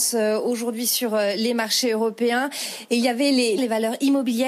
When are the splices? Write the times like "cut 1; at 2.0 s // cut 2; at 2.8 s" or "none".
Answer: cut 1; at 3.6 s

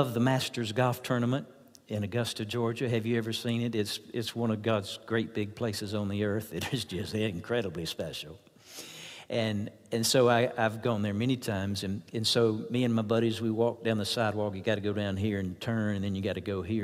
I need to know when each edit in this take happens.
none

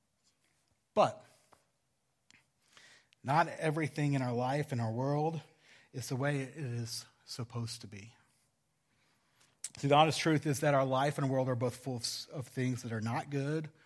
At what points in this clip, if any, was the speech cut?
cut 1; at 9.7 s

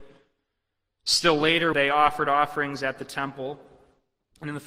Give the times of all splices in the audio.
cut 1; at 1.7 s

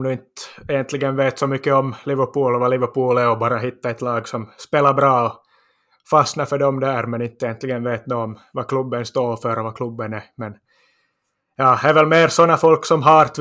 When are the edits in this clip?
none

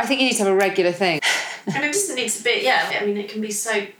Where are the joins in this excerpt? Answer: cut 1; at 1.2 s // cut 2; at 2.9 s

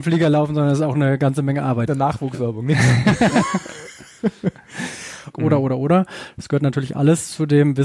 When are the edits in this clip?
cut 1; at 1.9 s // cut 2; at 5.3 s

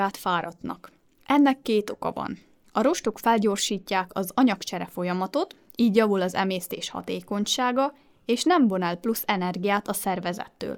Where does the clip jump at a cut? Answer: none

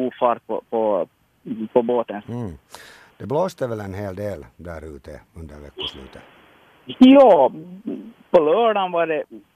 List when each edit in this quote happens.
cut 1; at 2.2 s

